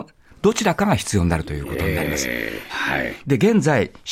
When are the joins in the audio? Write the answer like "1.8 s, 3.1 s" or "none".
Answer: 2.7 s